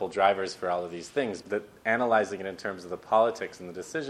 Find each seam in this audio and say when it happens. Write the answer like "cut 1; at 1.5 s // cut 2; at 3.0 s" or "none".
cut 1; at 1.4 s